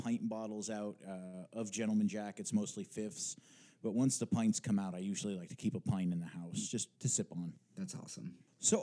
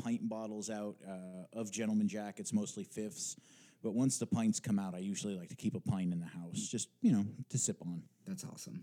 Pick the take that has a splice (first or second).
first